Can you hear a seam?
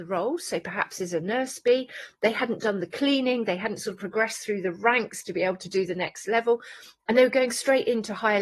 no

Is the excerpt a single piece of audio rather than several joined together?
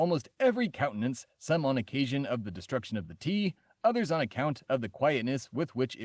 yes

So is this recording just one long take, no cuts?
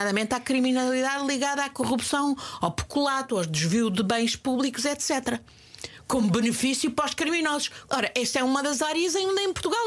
no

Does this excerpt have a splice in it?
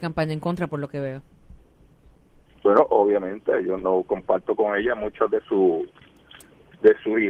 yes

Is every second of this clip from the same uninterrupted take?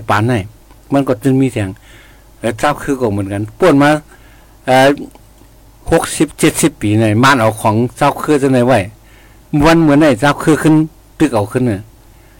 yes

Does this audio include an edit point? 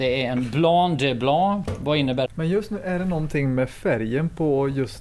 yes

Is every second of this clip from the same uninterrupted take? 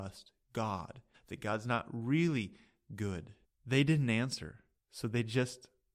no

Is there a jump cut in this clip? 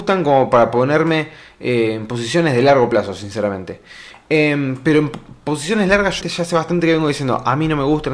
yes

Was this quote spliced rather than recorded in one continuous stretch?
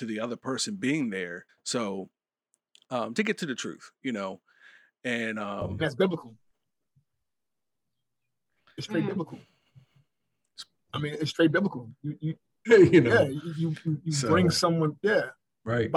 yes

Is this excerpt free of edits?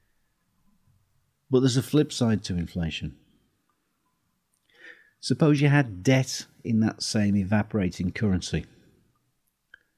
yes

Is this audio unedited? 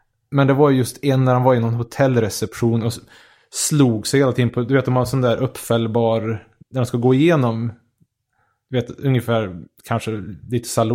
yes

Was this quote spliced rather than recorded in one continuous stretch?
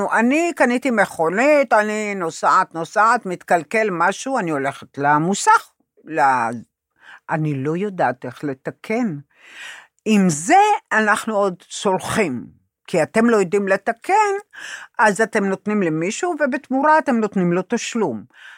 no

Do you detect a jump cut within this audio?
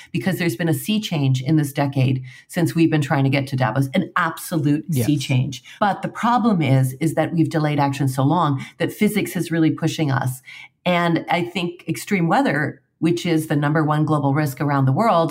yes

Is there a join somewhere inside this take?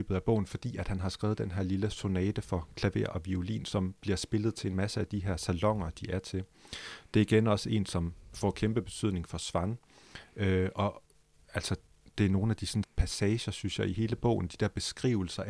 yes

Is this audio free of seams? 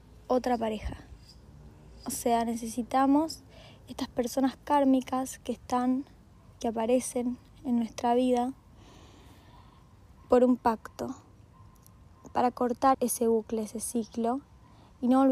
no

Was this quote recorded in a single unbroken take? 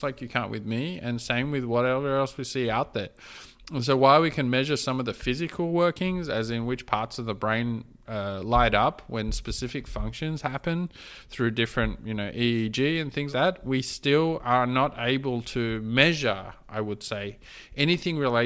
no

